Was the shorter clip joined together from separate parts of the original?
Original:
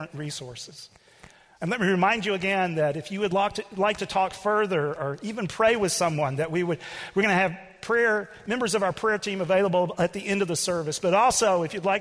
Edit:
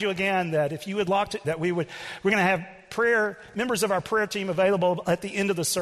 yes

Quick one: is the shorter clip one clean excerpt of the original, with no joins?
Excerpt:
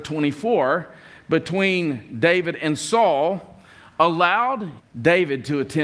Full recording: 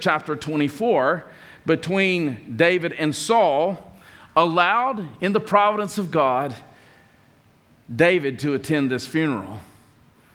no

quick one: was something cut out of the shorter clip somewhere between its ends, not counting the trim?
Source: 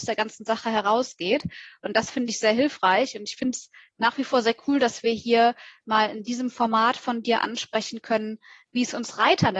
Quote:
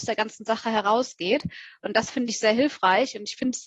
no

